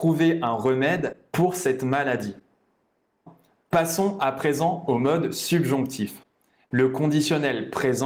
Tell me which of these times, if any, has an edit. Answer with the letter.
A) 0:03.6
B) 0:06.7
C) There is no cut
B